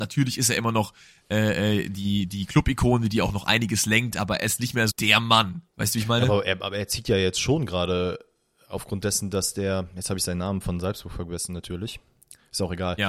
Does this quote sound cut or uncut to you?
cut